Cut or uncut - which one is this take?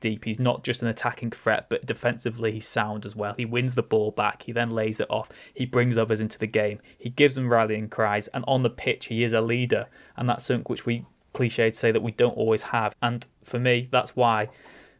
cut